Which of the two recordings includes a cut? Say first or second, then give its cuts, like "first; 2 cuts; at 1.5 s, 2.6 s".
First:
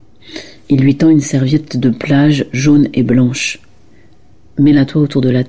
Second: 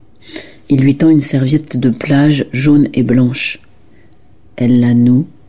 second; 1 cut; at 4.5 s